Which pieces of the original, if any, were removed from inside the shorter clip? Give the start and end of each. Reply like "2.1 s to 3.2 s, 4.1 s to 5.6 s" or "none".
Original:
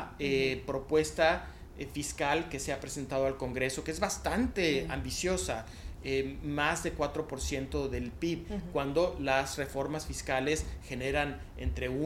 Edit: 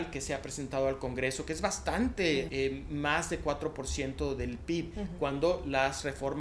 4.9 s to 6.0 s